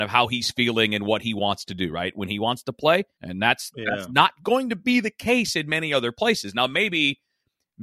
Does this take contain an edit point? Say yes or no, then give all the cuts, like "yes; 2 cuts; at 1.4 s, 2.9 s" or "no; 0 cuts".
yes; 1 cut; at 3.2 s